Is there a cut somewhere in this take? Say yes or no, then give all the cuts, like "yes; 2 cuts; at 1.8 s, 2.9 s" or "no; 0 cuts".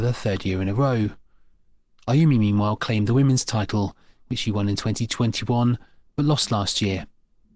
no; 0 cuts